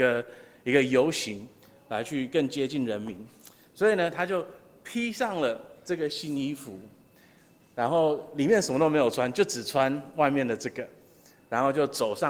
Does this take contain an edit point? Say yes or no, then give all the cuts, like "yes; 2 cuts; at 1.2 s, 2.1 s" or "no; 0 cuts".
no; 0 cuts